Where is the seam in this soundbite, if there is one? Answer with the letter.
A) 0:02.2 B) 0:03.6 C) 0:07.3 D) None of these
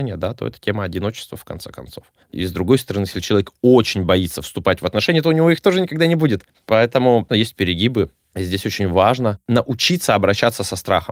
C